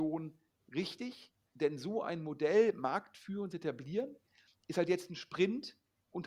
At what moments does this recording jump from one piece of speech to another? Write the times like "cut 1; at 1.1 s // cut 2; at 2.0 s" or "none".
none